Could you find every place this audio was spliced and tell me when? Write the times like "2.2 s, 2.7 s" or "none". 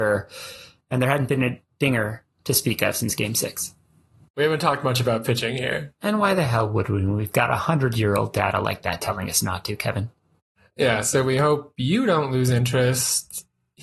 none

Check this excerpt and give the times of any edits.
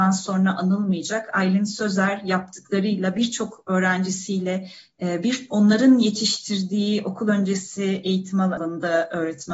none

